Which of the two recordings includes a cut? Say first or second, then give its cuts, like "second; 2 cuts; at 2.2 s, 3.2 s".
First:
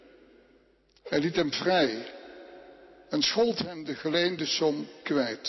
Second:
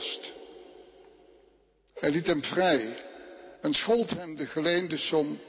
second; 2 cuts; at 1.9 s, 3.6 s